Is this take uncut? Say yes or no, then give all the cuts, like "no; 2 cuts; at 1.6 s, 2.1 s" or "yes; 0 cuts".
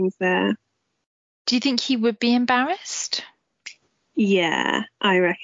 yes; 0 cuts